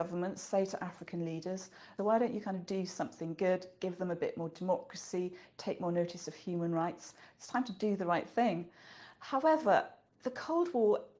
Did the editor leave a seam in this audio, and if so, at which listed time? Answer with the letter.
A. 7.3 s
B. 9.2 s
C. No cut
B